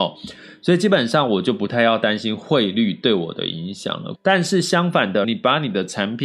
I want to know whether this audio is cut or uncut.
cut